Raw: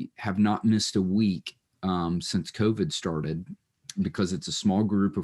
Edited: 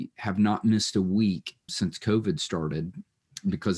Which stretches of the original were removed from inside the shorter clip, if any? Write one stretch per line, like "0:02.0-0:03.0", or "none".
0:01.7-0:02.2